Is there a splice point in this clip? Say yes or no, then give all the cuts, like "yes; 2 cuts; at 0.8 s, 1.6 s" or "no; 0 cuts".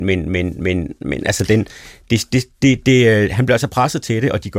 no; 0 cuts